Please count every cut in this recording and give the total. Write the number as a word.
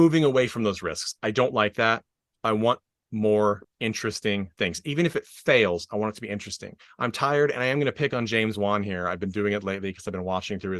zero